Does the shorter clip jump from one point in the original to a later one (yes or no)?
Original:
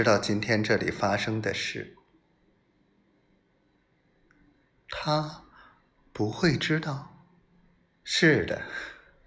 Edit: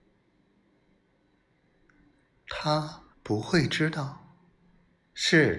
yes